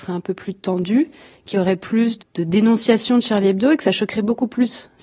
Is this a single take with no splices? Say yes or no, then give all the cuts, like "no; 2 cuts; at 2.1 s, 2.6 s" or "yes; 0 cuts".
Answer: no; 1 cut; at 2.2 s